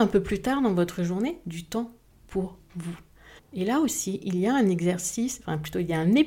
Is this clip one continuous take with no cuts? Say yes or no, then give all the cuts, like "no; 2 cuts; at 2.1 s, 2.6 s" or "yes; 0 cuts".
no; 1 cut; at 3.4 s